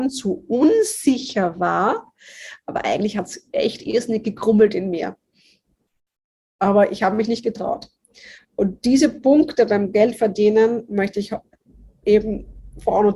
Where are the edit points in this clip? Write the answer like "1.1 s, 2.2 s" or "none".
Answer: none